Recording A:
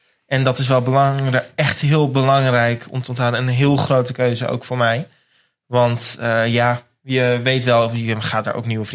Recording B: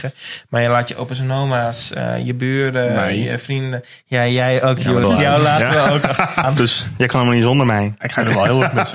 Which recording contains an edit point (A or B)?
B